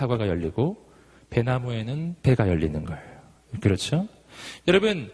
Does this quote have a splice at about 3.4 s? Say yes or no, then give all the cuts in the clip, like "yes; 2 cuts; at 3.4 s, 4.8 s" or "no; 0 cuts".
no; 0 cuts